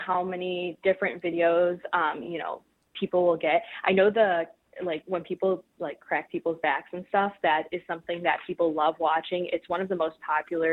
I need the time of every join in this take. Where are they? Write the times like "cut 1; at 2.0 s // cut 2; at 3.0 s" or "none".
none